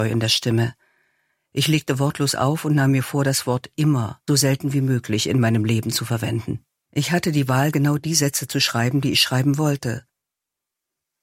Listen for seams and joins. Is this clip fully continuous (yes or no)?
no